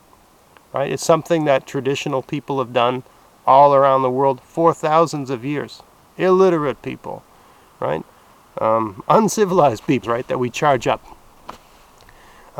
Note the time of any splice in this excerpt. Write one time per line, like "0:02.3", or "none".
0:10.0